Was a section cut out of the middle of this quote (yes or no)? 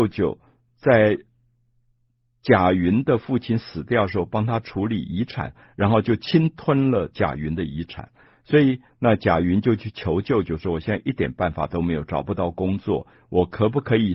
yes